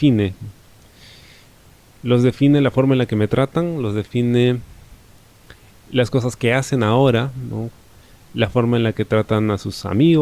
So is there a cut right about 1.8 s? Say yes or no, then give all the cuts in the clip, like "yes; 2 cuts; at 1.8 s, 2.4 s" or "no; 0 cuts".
no; 0 cuts